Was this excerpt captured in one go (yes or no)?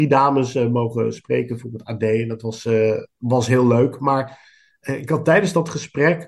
yes